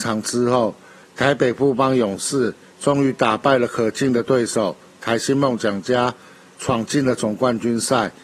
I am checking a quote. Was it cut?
no; 0 cuts

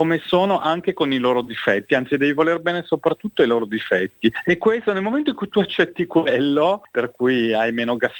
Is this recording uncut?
no; 1 cut; at 6.9 s

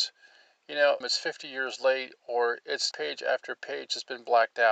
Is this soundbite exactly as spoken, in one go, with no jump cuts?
no; 2 cuts; at 1.0 s, 2.9 s

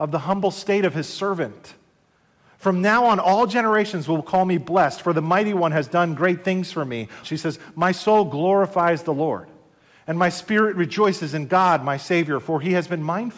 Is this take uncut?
no; 1 cut; at 7.2 s

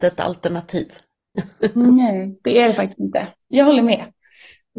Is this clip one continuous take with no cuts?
yes; 0 cuts

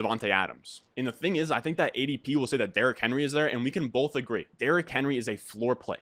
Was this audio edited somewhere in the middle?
yes; 1 cut; at 4.5 s

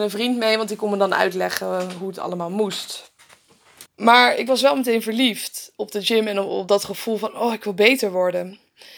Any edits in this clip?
yes; 2 cuts; at 3.9 s, 5.8 s

